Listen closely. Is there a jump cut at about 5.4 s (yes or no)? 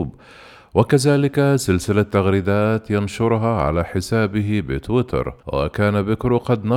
yes